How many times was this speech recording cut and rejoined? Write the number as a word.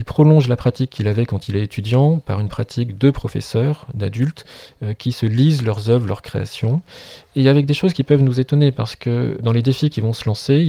two